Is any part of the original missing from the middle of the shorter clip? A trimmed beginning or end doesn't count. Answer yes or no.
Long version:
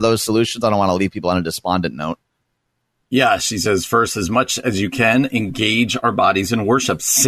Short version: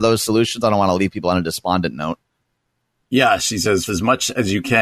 yes